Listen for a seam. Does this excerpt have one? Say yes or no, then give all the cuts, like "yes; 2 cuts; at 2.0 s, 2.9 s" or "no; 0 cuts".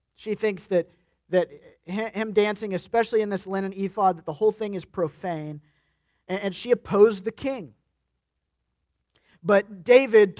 no; 0 cuts